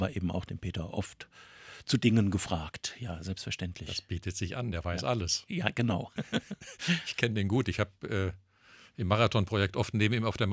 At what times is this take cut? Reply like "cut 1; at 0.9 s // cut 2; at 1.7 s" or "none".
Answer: none